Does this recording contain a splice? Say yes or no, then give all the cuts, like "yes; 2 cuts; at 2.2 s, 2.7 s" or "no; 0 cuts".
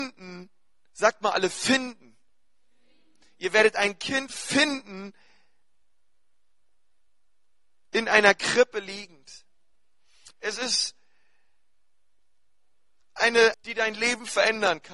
yes; 2 cuts; at 10.3 s, 13.5 s